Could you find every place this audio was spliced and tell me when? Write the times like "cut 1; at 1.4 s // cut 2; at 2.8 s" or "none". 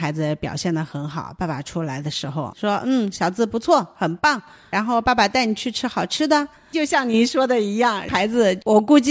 none